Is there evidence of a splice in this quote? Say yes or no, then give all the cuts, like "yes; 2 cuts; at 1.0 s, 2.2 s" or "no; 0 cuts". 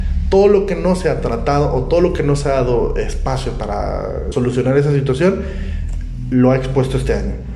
yes; 1 cut; at 4.3 s